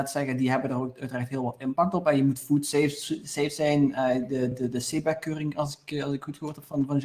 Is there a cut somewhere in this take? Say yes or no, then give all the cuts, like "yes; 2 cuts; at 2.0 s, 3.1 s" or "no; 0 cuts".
no; 0 cuts